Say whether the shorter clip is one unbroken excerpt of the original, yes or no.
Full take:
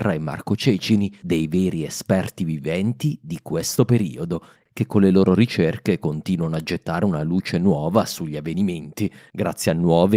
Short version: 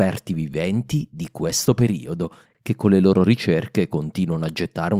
yes